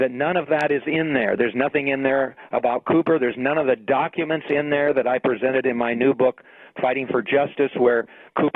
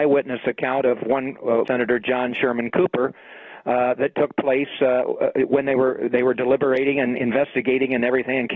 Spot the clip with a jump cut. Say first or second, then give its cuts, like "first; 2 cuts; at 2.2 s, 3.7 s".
second; 1 cut; at 1.7 s